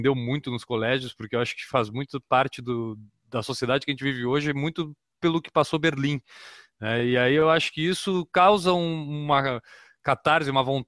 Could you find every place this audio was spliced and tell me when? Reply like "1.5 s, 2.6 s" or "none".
none